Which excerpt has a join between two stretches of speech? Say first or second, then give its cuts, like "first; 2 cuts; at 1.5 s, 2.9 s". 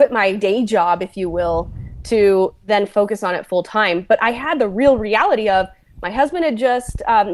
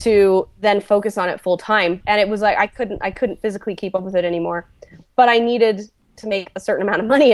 second; 1 cut; at 2.0 s